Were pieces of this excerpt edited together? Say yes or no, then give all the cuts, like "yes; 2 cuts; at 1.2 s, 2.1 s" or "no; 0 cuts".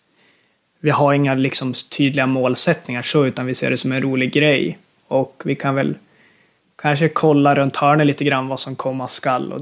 no; 0 cuts